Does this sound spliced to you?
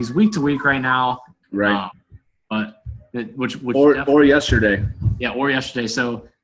yes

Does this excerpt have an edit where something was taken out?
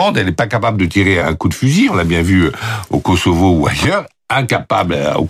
yes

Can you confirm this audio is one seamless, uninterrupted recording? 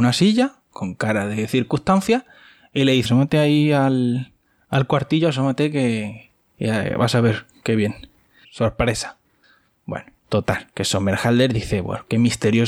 no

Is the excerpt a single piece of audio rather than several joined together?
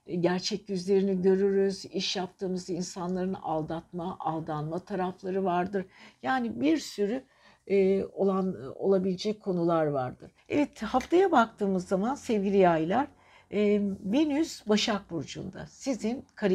no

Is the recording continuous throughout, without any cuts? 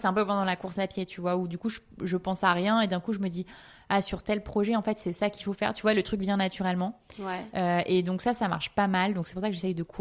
yes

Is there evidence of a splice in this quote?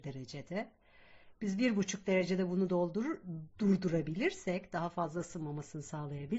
no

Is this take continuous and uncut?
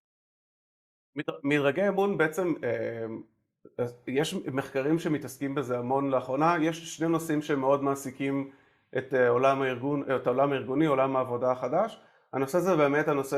yes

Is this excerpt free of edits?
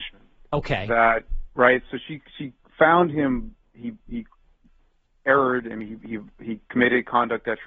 yes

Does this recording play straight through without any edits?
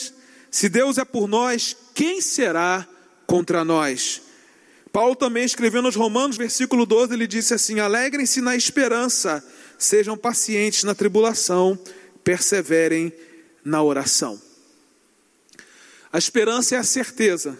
no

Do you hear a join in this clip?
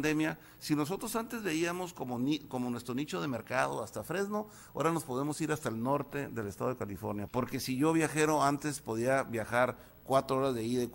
yes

